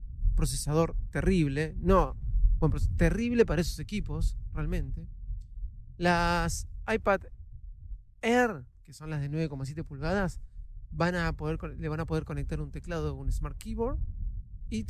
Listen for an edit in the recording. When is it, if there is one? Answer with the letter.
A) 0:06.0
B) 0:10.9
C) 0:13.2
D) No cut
D